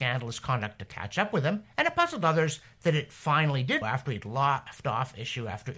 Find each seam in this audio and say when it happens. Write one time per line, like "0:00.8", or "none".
0:03.8